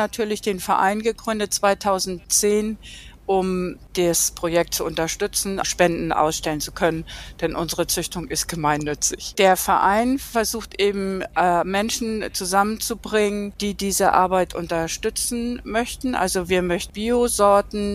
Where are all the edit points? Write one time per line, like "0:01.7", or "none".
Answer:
0:05.6